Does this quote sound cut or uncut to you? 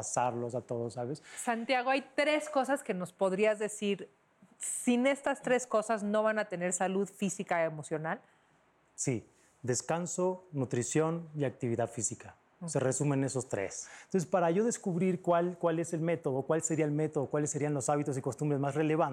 uncut